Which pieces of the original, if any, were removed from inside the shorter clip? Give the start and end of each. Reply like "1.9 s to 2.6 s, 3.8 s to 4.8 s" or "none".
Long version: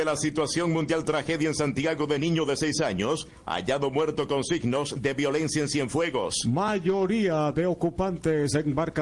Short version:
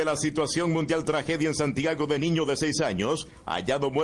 none